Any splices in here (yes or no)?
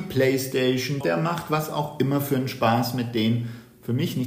yes